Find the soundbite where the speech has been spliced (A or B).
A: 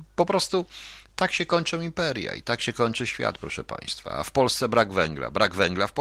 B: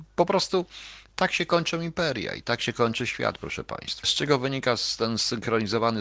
B